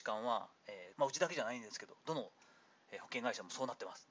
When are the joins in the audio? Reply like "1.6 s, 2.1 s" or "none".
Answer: 0.9 s

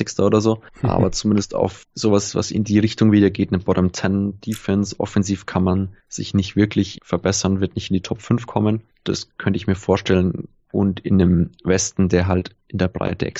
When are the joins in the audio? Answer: none

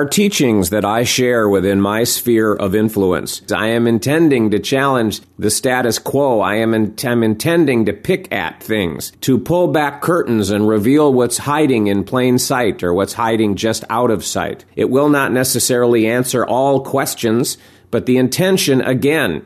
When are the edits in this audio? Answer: 3.5 s, 14.7 s

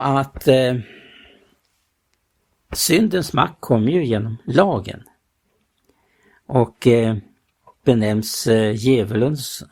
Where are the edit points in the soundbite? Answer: 7.8 s

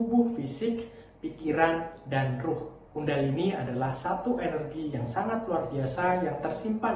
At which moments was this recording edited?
2.9 s

